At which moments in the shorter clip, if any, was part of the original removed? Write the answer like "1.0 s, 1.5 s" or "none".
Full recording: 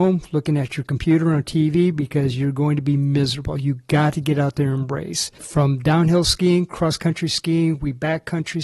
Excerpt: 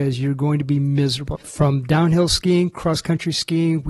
1.4 s

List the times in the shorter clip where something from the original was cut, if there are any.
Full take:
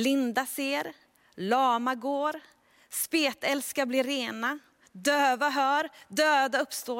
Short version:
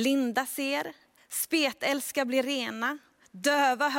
1.2 s

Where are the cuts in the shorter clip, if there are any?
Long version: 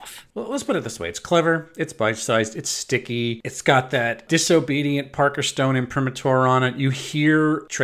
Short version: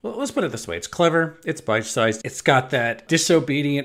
2.2 s

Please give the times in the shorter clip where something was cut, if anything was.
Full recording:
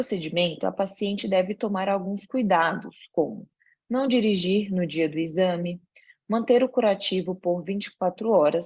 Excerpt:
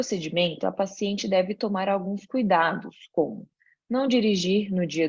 none

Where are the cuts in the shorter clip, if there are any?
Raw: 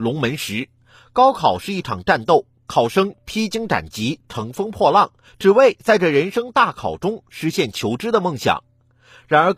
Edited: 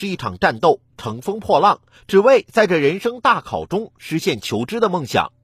0.9 s

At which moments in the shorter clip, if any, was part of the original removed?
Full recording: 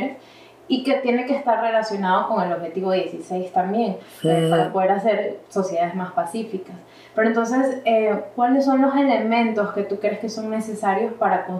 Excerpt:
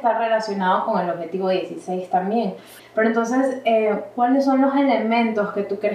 2.8 s

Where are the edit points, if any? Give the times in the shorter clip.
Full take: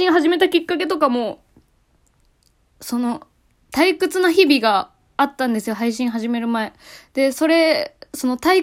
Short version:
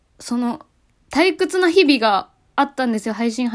none

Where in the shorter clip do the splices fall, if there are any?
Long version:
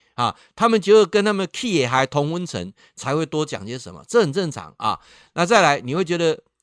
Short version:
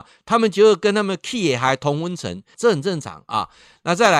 2.5 s

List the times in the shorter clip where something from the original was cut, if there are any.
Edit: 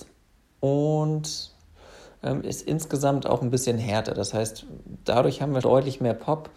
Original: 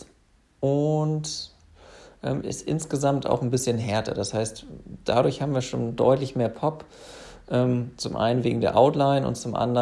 5.6 s

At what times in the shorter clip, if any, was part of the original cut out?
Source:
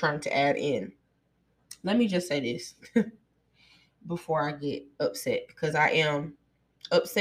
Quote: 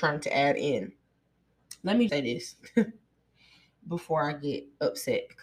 2.1 s

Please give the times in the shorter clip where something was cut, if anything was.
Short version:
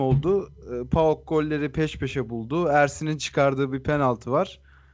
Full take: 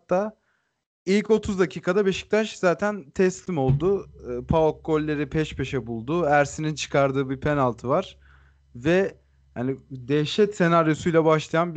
none

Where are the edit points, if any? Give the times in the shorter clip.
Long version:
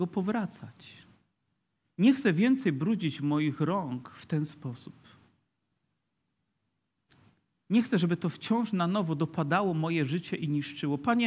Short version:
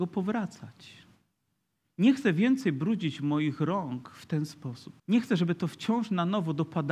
5.0 s

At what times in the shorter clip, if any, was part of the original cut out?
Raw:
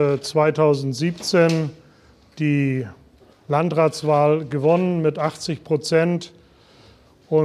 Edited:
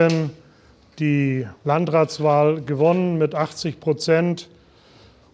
1.6 s

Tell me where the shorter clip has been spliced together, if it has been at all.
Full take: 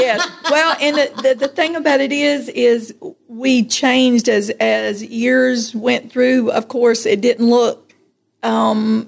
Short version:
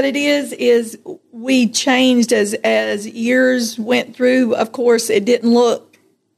none

